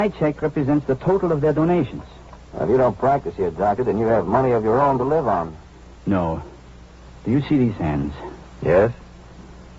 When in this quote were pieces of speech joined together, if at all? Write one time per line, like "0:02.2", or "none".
none